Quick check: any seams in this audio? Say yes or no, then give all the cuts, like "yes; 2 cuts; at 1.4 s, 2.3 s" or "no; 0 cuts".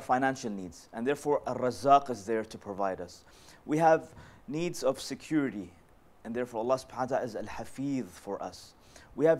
no; 0 cuts